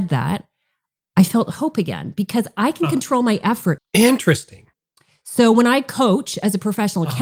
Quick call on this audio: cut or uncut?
cut